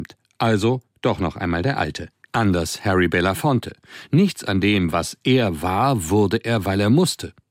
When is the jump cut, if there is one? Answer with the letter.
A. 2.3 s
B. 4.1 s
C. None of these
A